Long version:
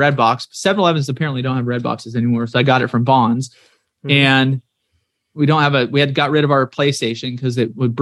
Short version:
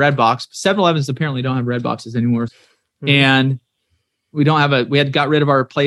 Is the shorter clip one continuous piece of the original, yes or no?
no